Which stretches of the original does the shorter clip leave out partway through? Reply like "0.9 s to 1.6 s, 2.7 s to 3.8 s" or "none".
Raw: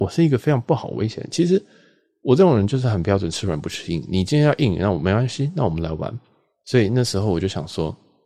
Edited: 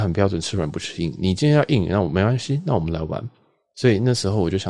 none